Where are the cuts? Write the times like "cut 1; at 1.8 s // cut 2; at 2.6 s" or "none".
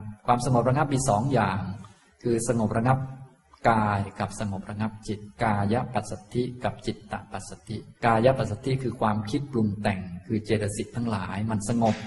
cut 1; at 5.3 s // cut 2; at 8.0 s